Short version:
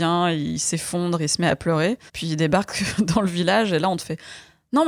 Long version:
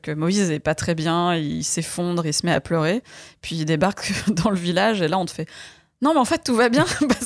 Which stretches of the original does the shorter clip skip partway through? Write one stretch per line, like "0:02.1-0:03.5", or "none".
0:03.1-0:03.4